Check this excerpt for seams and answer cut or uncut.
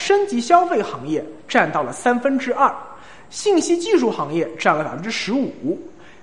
uncut